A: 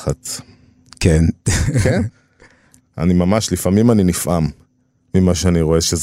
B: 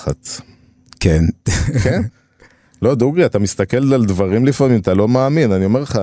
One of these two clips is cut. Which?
A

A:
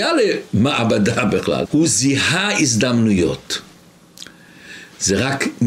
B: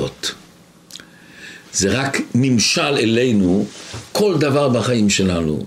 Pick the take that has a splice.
A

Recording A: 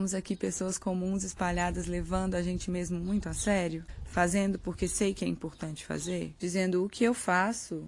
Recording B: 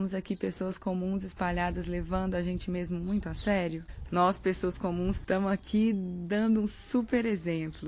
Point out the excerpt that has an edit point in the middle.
B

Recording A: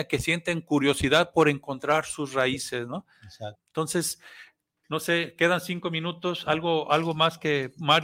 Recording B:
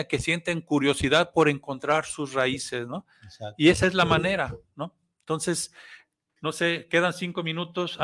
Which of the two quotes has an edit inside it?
A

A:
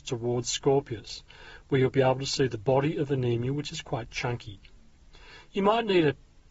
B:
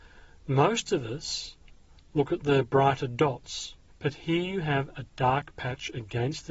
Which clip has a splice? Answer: B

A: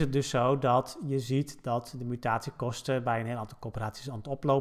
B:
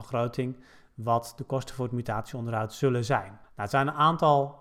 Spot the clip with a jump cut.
B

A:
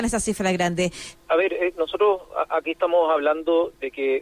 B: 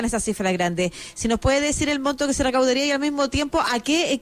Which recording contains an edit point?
A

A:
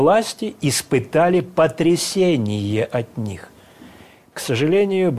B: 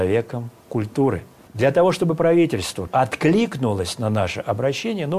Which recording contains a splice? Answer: B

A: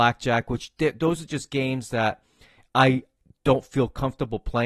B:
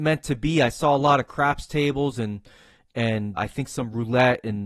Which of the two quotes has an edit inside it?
B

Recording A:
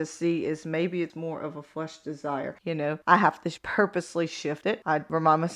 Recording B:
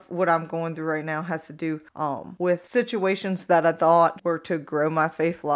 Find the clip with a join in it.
A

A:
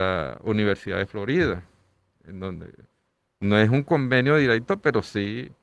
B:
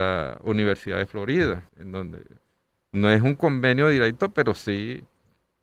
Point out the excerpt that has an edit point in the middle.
B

